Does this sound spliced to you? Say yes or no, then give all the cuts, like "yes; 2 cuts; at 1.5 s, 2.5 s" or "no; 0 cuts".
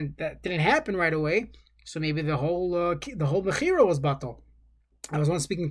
no; 0 cuts